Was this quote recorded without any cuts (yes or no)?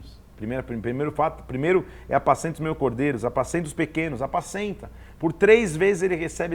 yes